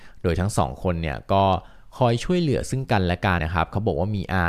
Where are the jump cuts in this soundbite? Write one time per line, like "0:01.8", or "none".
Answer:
0:03.4